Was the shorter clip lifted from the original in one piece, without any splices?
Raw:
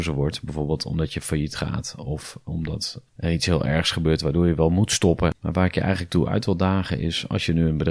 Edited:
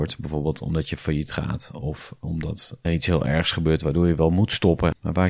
no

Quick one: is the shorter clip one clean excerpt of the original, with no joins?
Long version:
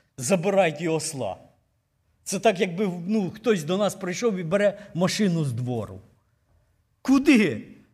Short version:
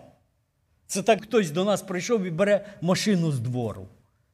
no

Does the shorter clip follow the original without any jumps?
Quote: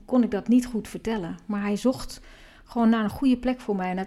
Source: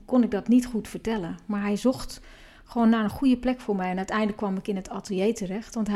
yes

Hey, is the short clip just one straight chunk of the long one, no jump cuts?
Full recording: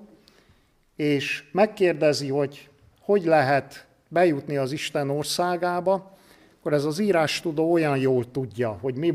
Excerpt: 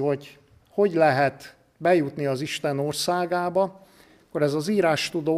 yes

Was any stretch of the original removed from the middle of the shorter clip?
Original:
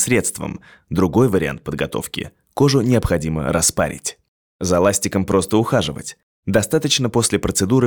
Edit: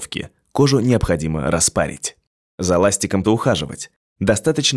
yes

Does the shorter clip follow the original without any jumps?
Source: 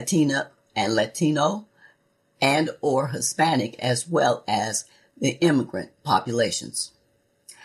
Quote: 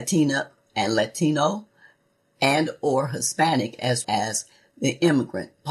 no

